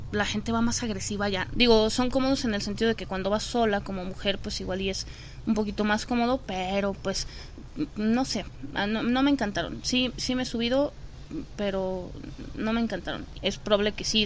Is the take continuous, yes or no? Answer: no